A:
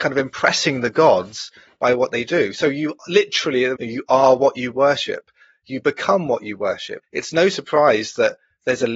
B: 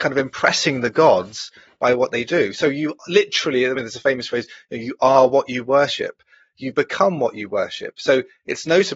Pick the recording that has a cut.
A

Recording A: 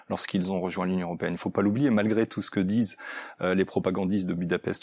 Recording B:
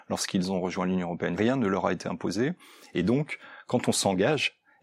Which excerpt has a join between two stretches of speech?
B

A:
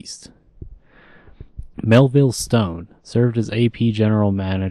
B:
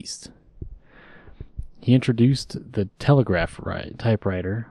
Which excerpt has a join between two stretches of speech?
A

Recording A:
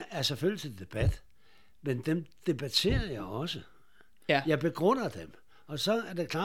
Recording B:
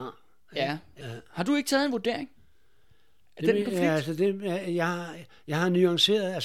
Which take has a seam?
B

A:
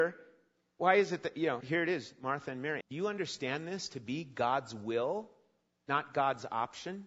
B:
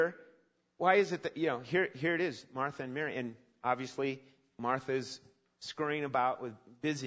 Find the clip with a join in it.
A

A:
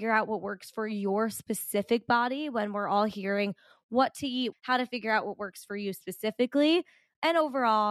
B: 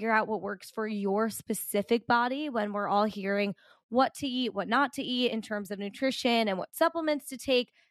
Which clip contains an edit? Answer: A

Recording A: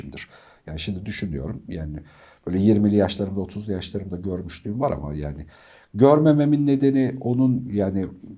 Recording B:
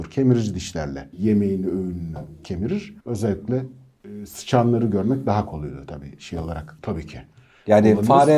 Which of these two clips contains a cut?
B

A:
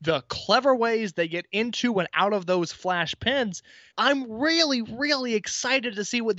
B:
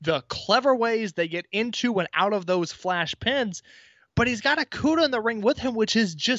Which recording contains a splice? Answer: A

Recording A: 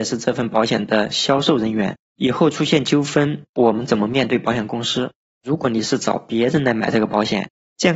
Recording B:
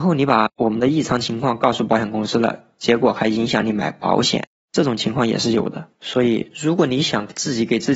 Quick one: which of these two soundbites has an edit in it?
B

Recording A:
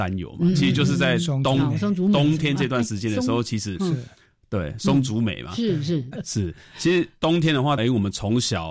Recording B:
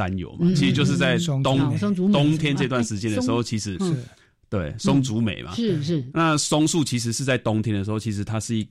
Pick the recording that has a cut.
A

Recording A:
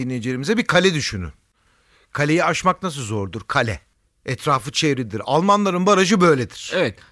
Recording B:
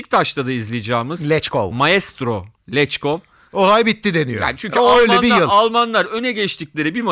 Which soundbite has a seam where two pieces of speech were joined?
B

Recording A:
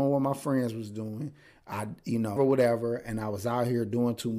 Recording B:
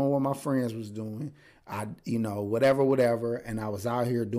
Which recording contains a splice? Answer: A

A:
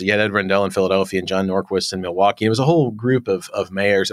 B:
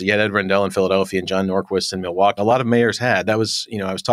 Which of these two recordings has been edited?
B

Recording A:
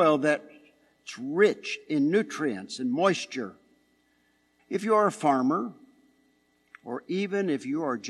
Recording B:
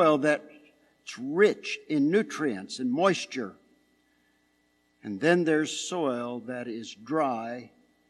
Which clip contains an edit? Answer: A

